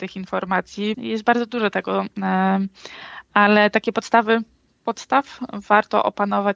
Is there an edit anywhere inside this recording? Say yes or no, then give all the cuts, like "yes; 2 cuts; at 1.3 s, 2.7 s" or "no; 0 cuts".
yes; 1 cut; at 0.9 s